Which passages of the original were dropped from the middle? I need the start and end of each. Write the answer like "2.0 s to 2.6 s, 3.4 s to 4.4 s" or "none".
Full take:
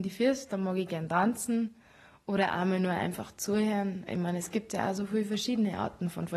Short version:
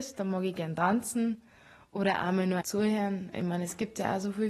2.9 s to 3.3 s